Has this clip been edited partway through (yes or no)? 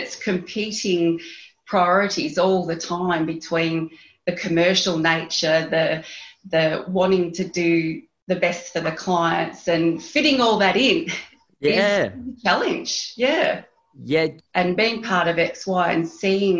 yes